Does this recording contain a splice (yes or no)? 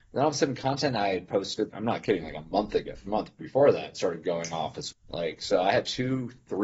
yes